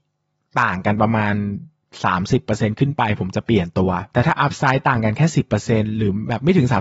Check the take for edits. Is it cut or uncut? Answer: uncut